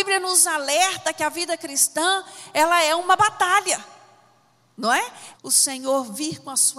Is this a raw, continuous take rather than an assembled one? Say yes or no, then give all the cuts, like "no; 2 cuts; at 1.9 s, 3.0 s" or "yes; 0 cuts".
no; 1 cut; at 5.3 s